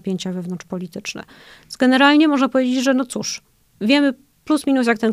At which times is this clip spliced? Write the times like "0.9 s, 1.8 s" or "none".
none